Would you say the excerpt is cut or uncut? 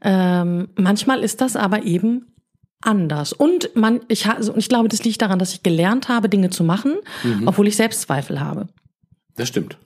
uncut